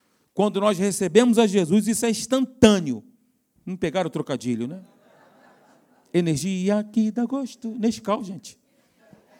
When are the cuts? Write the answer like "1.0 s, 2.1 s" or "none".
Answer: 3.6 s